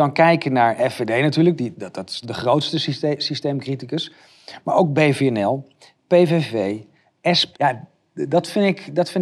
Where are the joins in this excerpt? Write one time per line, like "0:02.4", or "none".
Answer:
0:02.2
0:07.5